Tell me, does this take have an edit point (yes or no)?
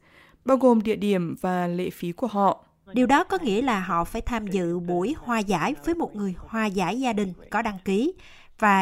yes